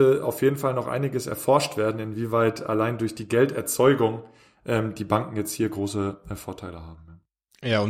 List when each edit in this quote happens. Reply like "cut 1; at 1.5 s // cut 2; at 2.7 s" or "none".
none